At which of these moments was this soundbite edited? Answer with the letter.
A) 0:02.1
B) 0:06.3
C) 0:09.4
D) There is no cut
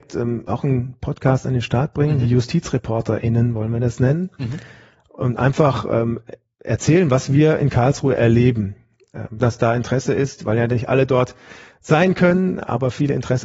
C